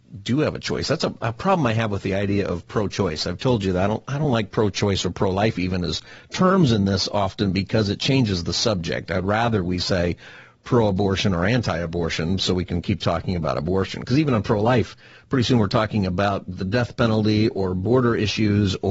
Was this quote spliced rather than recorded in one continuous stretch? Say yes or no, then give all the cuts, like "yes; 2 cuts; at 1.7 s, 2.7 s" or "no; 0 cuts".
no; 0 cuts